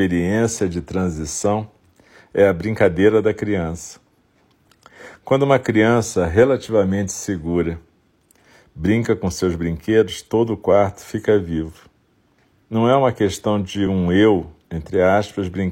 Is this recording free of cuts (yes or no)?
yes